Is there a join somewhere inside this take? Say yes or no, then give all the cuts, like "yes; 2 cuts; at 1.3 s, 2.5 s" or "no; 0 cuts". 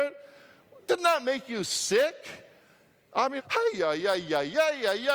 yes; 1 cut; at 3.4 s